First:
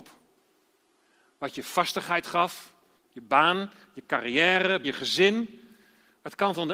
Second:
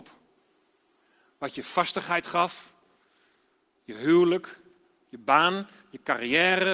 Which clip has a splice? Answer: first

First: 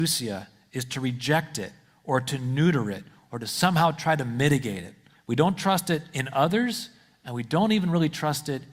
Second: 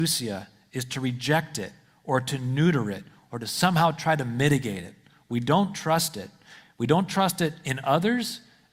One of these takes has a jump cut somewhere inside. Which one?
first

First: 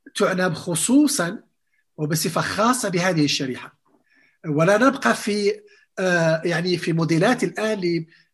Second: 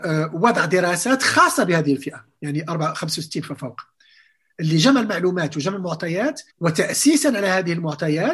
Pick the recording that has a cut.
second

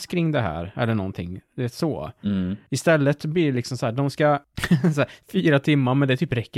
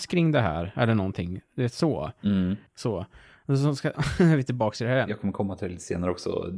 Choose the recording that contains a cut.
second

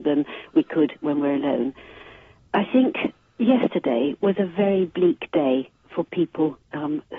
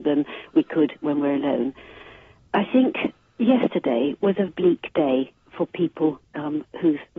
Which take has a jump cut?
second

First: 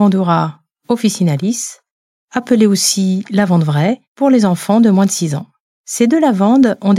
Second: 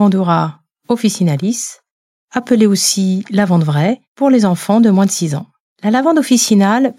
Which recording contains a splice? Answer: second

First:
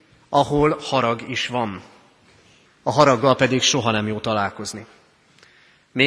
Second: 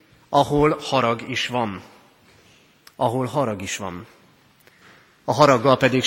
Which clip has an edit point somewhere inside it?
first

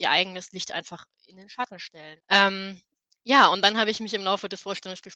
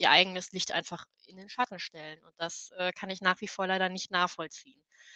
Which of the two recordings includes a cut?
first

